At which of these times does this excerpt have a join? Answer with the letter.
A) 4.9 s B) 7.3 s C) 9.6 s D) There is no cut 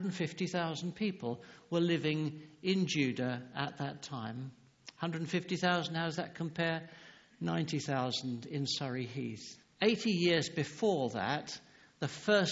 C